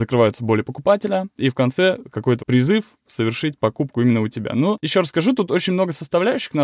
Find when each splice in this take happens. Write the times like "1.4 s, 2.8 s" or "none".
2.4 s